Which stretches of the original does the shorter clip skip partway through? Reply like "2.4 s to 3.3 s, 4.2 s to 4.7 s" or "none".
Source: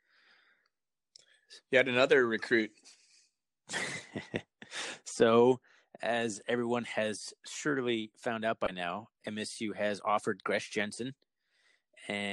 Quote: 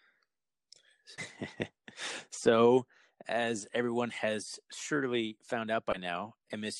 1.6 s to 3.9 s